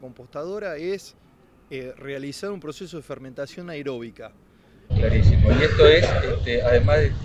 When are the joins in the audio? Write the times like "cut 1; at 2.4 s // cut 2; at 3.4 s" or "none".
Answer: cut 1; at 4.9 s

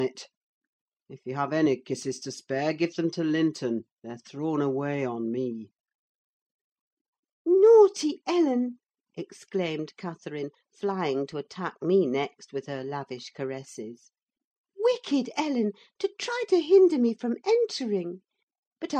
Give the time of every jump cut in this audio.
none

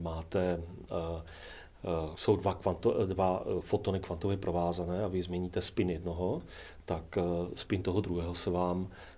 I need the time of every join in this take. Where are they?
cut 1; at 2.1 s

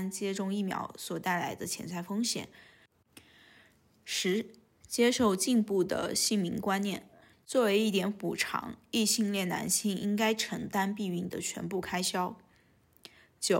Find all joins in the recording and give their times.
cut 1; at 7.3 s

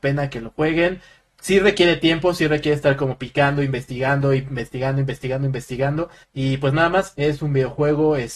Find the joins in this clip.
cut 1; at 6.2 s

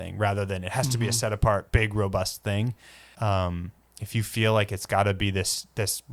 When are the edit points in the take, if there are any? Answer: cut 1; at 3.1 s

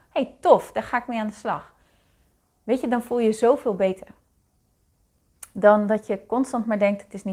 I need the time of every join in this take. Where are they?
none

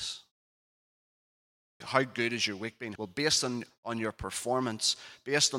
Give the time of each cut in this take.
cut 1; at 1.8 s // cut 2; at 3.0 s

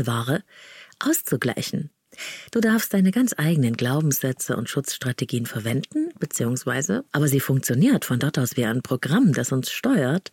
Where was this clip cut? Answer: cut 1; at 2.5 s // cut 2; at 7.1 s

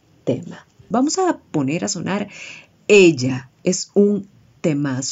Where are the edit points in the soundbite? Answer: cut 1; at 0.9 s

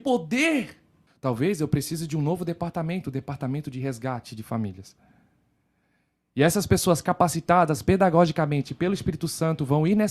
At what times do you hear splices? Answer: cut 1; at 1.1 s

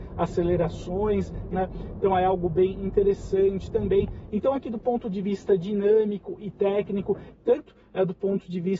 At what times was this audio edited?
cut 1; at 1.5 s // cut 2; at 4.3 s // cut 3; at 7.3 s

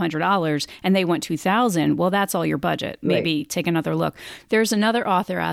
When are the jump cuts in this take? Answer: cut 1; at 3.0 s

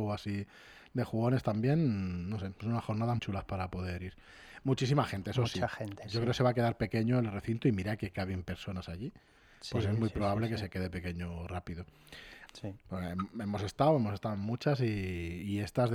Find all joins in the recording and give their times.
cut 1; at 3.2 s // cut 2; at 12.5 s

